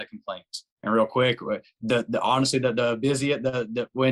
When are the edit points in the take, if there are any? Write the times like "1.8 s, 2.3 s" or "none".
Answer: none